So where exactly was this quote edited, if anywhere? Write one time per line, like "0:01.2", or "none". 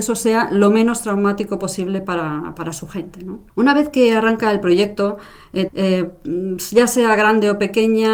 0:03.5
0:05.7

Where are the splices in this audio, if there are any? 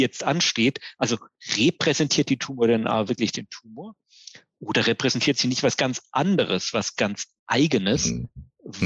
none

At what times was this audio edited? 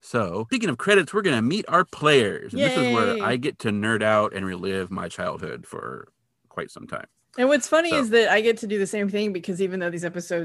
none

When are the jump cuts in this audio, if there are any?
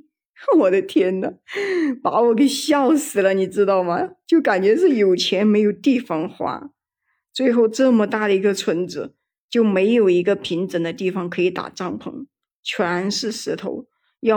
none

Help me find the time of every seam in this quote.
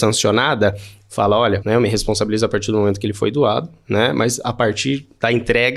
0:01.6

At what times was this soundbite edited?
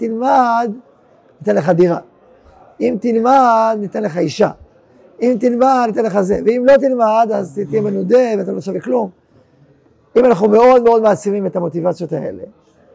none

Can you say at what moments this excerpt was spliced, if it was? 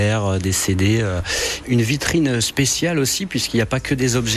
0:01.6

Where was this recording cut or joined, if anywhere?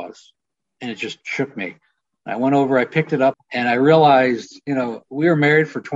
0:03.3

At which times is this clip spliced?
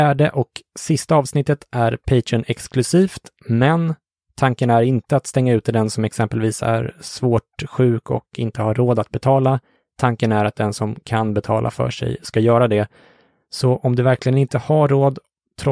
none

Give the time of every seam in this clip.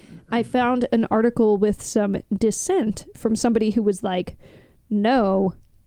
none

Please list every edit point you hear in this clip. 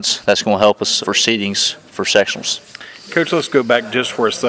0:01.0

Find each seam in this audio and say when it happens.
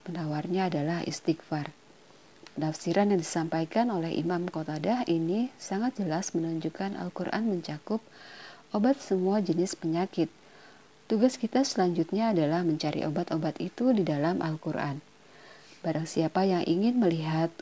none

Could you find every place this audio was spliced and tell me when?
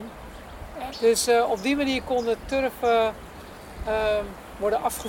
0:00.9

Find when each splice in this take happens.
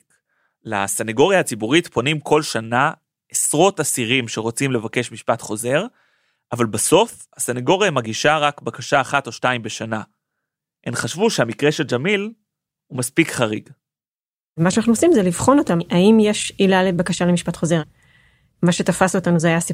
none

